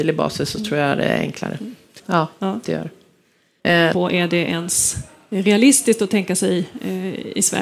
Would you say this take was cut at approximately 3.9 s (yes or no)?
yes